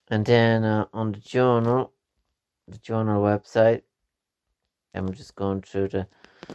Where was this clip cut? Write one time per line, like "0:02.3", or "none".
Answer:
0:04.9